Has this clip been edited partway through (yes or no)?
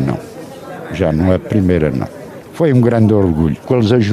yes